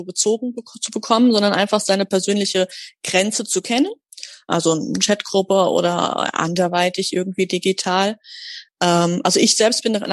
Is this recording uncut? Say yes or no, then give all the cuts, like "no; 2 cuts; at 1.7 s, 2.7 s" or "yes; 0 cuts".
no; 2 cuts; at 4.5 s, 8.7 s